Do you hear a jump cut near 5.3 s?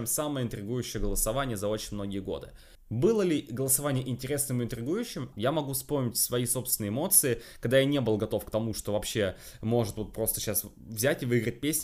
yes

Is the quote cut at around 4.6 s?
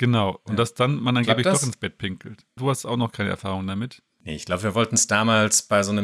no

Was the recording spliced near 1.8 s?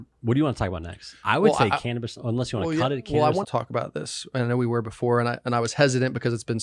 no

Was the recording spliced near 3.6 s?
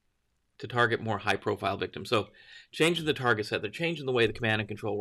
no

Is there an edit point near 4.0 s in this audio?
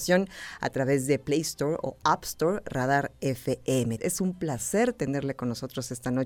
yes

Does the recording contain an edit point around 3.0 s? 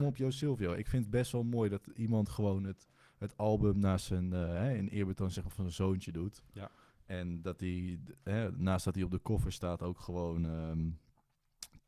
no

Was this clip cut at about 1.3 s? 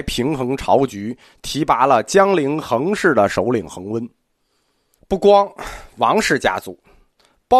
no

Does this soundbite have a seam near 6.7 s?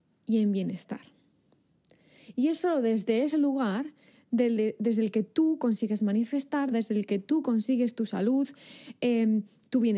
yes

